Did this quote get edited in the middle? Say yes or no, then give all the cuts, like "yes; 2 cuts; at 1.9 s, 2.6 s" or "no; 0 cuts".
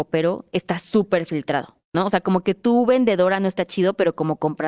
no; 0 cuts